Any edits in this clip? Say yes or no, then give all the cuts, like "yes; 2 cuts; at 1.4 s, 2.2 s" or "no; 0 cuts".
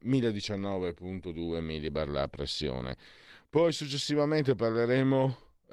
no; 0 cuts